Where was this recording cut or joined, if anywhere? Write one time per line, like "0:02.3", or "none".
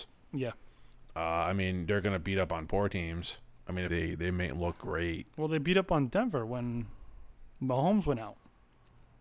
0:03.9